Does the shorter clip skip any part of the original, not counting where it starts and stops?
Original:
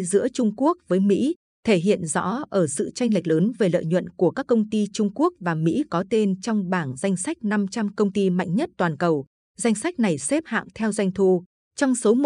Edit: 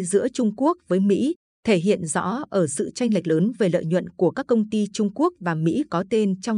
no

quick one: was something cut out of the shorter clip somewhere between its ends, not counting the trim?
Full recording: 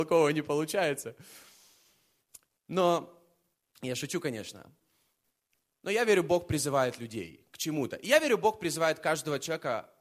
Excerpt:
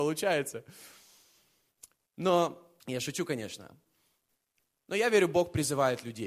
yes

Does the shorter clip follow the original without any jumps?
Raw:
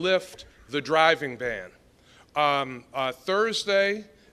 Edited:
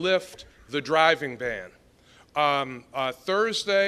yes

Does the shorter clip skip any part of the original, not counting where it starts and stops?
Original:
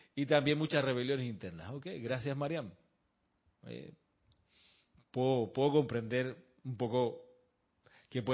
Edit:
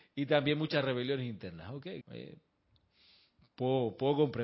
yes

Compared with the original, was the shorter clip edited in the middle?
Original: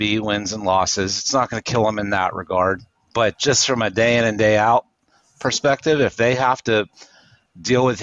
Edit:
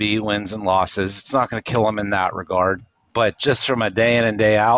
no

